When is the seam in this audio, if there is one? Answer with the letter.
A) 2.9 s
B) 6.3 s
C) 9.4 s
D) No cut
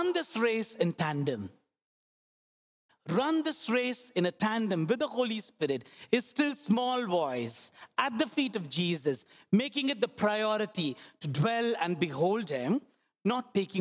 A